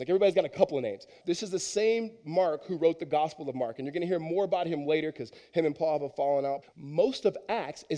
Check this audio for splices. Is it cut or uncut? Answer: cut